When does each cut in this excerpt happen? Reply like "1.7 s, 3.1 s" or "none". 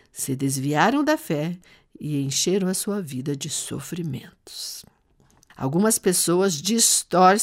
5.5 s